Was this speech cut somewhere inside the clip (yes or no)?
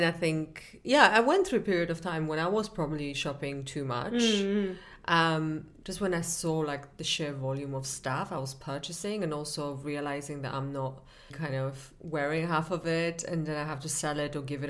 yes